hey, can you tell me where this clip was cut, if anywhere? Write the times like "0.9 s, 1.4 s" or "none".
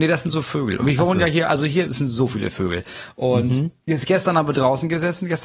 1.9 s